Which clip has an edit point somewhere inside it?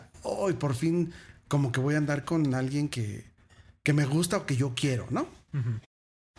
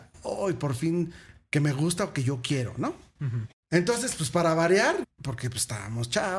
second; 3 cuts; at 1.3 s, 3.6 s, 5.0 s

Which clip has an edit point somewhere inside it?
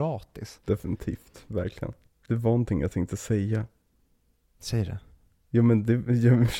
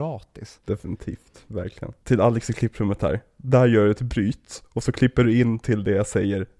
second; 1 cut; at 2.0 s

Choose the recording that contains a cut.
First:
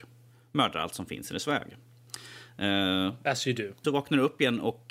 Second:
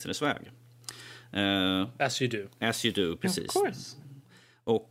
first; 1 cut; at 3.8 s

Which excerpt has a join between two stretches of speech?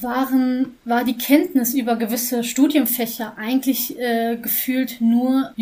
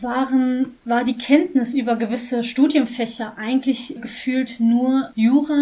second; 1 cut; at 4.0 s

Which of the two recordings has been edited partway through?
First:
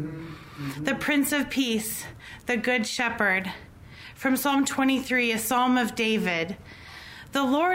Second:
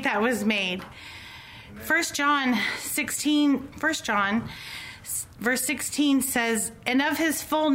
second; 1 cut; at 3.7 s

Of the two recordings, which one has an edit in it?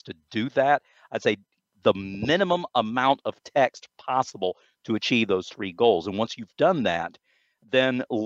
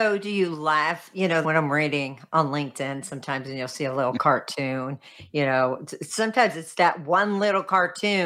second; 1 cut; at 1.4 s

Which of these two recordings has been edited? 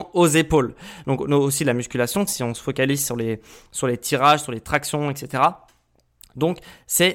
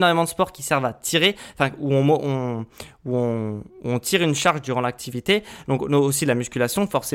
first; 2 cuts; at 1.0 s, 2.3 s

